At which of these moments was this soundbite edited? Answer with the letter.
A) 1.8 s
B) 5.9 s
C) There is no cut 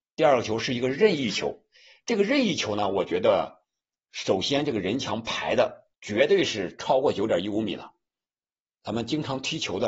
B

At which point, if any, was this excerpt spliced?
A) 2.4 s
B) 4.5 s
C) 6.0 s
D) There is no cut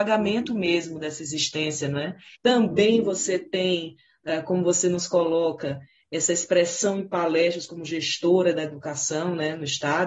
A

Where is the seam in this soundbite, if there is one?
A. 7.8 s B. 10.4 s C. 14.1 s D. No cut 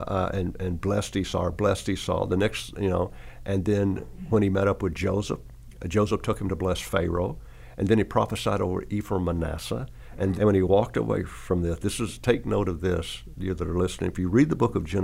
B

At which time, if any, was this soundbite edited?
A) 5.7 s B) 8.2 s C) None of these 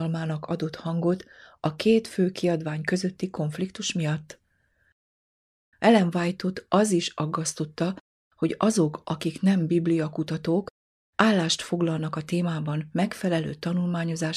A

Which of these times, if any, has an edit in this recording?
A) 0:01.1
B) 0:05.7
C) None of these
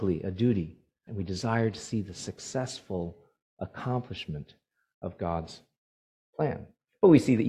A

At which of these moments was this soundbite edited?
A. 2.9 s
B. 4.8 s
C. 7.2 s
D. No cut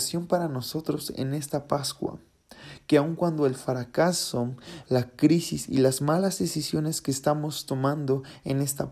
B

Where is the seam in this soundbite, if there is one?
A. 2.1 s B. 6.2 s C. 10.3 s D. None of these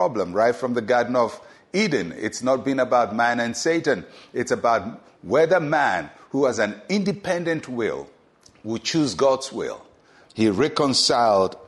C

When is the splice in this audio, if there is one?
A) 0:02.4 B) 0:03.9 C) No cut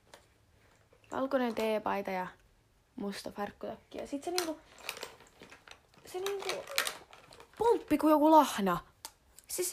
C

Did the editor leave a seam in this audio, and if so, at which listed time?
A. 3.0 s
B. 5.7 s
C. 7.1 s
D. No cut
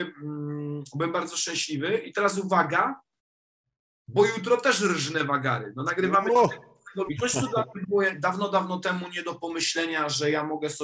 C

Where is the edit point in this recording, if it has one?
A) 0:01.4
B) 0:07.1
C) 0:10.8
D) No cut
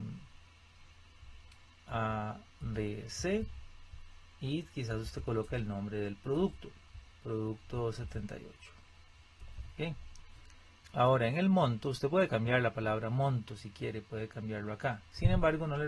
C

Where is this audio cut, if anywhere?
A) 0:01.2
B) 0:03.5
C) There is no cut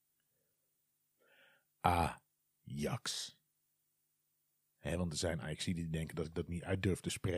C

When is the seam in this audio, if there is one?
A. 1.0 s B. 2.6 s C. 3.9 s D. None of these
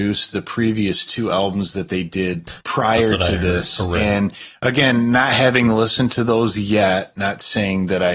B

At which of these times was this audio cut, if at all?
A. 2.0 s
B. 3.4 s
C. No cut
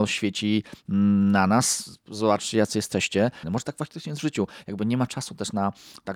B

